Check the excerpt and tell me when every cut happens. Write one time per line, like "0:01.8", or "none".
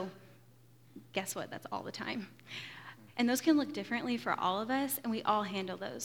0:03.1